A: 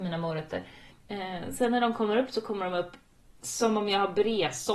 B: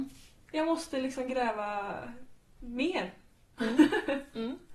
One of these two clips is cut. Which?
A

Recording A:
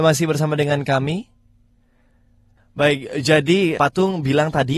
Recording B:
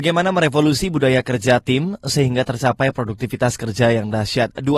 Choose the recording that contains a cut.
A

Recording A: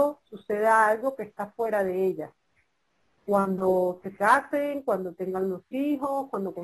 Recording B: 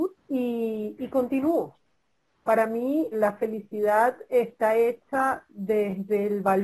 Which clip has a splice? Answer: B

